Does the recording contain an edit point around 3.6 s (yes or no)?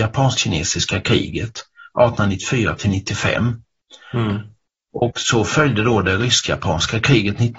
no